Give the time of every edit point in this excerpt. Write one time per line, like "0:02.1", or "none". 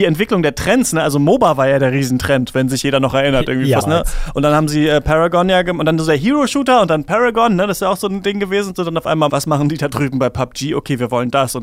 0:03.8
0:09.3